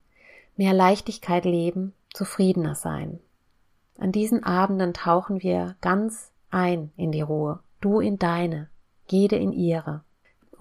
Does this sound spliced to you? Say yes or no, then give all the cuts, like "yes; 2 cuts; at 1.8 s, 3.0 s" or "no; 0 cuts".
no; 0 cuts